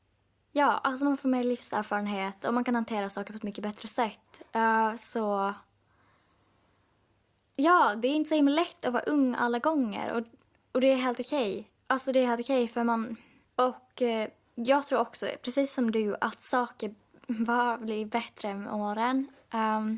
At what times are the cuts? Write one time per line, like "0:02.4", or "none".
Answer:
0:13.4